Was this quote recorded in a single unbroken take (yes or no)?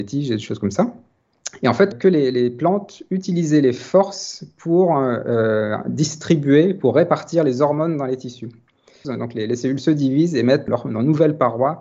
no